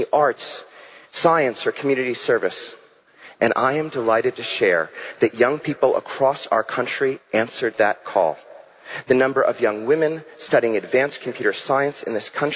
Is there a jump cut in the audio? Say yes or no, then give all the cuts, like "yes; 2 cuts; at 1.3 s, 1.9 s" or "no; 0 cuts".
no; 0 cuts